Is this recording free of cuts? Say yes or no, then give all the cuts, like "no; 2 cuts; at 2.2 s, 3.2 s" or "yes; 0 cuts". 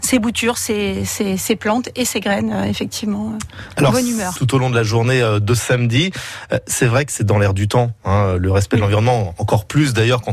no; 1 cut; at 4.4 s